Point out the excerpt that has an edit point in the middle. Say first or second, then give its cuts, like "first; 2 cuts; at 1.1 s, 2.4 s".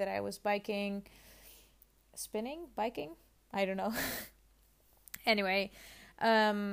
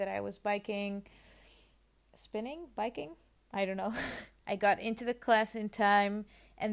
second; 1 cut; at 4.4 s